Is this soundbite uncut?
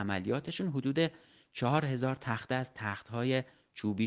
yes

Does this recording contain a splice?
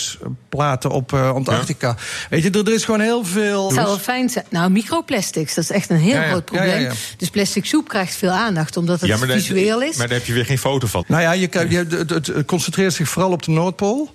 yes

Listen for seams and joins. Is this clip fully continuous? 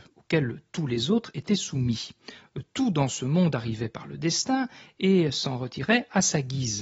yes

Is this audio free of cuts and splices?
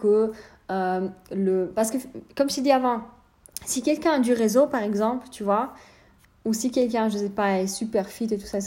yes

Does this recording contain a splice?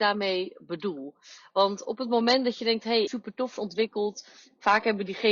yes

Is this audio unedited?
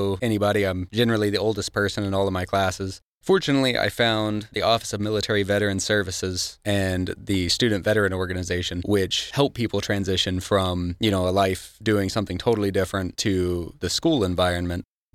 yes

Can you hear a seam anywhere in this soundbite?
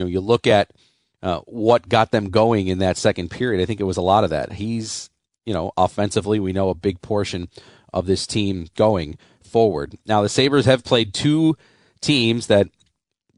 yes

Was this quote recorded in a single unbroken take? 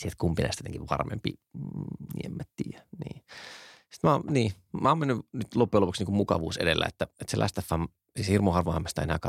yes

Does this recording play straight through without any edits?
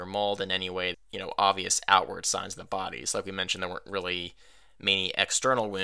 no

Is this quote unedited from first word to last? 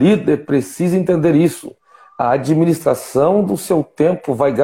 yes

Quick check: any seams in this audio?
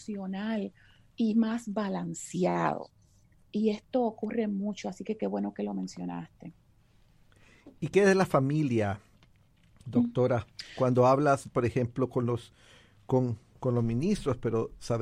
no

